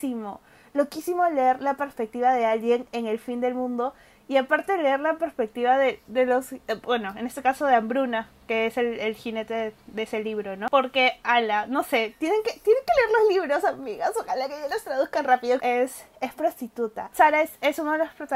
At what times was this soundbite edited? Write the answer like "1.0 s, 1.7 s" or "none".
15.6 s, 17.1 s